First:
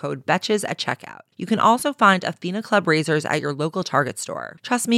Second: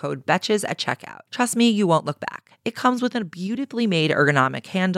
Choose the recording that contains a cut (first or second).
second